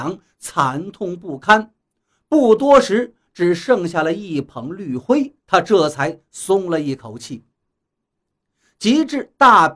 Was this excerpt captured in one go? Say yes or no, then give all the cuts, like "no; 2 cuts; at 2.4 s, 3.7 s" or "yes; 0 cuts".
no; 1 cut; at 5.4 s